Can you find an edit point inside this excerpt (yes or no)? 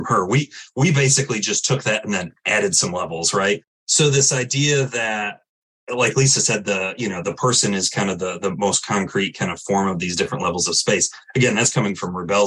yes